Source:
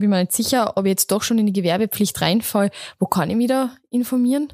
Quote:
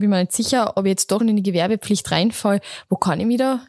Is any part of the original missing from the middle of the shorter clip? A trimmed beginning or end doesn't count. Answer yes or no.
yes